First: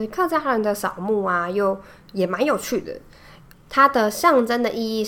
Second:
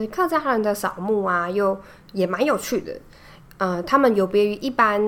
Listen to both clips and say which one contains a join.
first; 1 cut; at 3.5 s

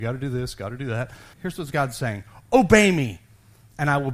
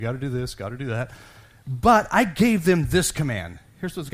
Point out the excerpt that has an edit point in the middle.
first; 1 cut; at 1.3 s

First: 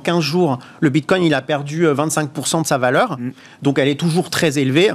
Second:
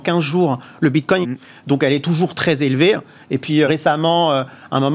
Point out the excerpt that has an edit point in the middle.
second; 2 cuts; at 1.2 s, 3.6 s

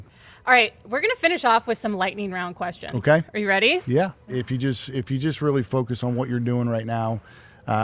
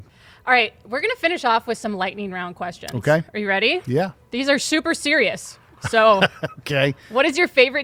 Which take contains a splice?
first; 1 cut; at 4.3 s

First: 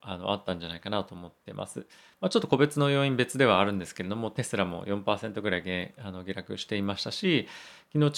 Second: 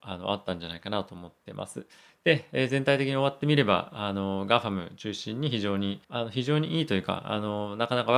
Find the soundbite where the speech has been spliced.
second; 2 cuts; at 2.1 s, 6.0 s

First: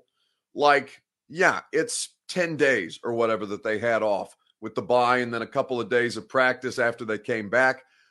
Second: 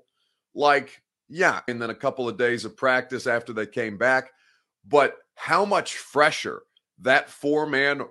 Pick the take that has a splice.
second; 1 cut; at 1.7 s

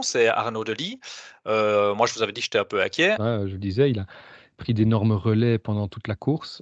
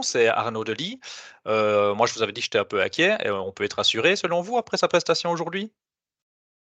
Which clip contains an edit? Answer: first; 1 cut; at 3.2 s

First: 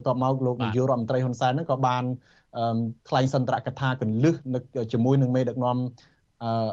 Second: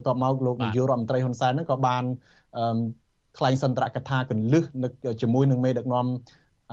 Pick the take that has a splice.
first; 1 cut; at 3.0 s

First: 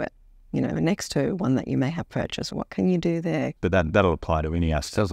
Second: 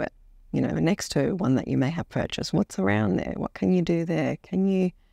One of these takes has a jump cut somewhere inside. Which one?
first; 2 cuts; at 2.5 s, 3.6 s

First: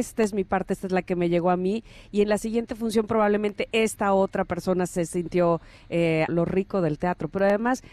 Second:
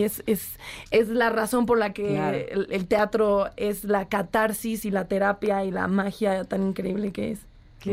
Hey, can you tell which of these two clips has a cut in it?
first; 1 cut; at 6.3 s

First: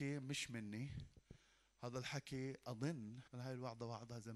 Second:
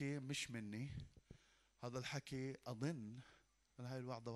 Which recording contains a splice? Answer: first; 1 cut; at 3.3 s

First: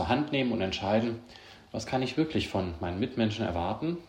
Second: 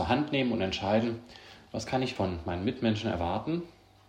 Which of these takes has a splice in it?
second; 1 cut; at 2.2 s

